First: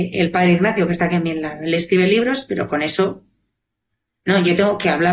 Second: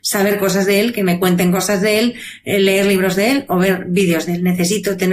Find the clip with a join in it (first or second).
first